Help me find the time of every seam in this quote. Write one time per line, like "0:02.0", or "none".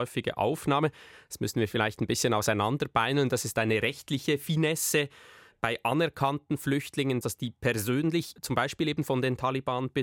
0:07.2
0:08.4